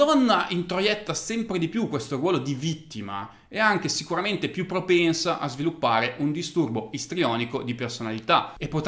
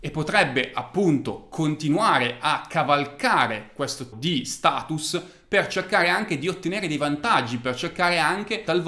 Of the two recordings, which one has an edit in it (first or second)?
second